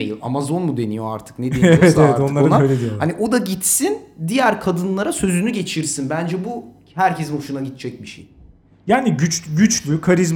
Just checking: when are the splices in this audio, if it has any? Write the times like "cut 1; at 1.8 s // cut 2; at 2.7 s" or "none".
none